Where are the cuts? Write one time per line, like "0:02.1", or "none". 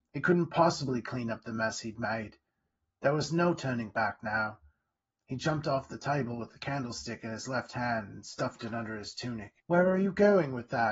0:09.6